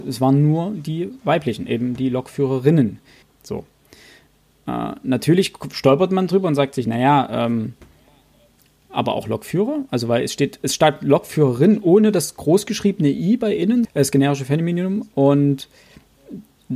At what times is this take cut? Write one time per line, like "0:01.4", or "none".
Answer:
0:03.2
0:13.8